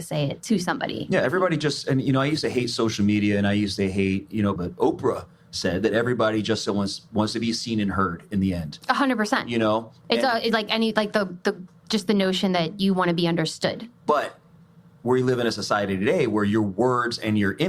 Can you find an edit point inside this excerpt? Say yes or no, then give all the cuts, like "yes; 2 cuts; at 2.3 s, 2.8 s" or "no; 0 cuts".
yes; 1 cut; at 4.6 s